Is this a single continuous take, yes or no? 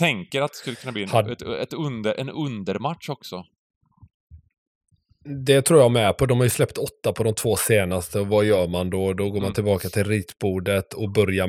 yes